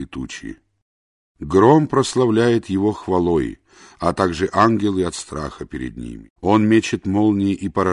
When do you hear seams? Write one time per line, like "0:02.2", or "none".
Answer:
0:06.4